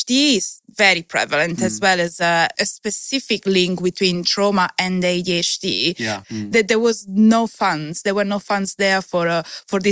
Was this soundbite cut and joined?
yes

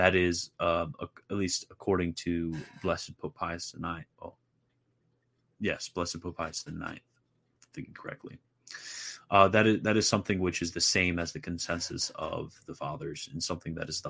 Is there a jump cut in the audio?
no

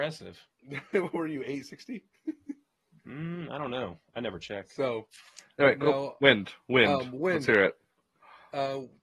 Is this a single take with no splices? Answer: yes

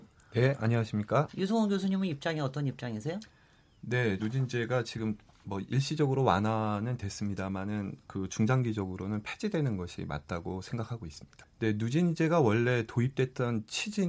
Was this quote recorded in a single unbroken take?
no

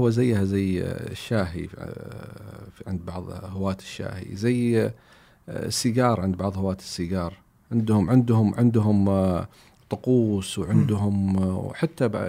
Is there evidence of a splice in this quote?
no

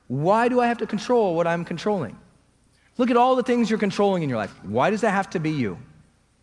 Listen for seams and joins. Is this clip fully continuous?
yes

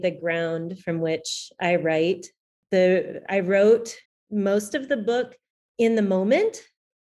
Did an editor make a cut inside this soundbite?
no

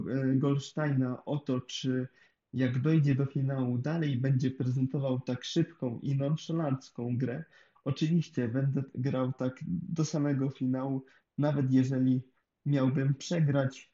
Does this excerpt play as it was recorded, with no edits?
no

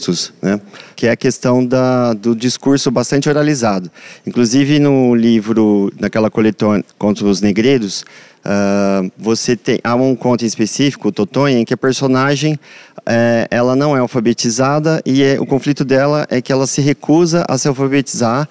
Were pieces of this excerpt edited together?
yes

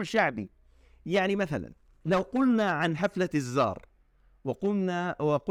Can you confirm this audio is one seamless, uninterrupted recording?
yes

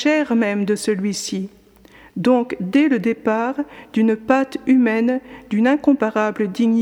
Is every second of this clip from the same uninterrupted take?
yes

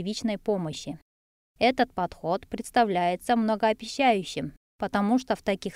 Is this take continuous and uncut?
no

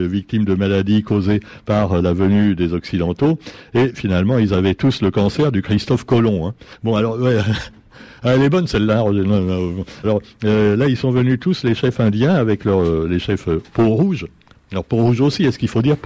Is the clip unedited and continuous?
no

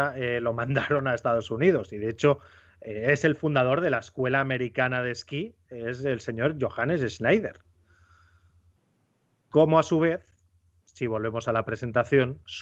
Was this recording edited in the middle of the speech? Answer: no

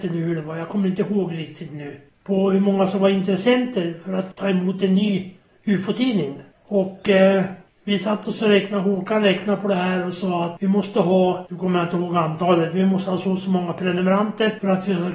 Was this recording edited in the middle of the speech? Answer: yes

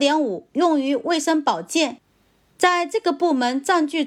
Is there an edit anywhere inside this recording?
yes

